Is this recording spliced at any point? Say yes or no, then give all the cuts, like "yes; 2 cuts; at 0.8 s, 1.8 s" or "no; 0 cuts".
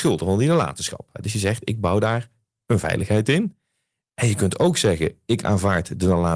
no; 0 cuts